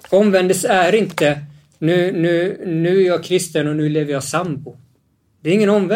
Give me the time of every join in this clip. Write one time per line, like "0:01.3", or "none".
none